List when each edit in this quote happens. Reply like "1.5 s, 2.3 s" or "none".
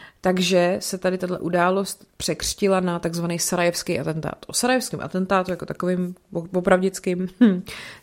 2.1 s